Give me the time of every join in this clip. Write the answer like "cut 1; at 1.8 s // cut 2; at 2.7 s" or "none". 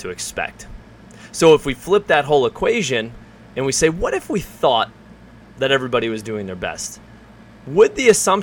none